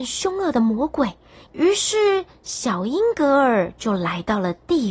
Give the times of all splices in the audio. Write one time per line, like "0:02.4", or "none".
0:01.5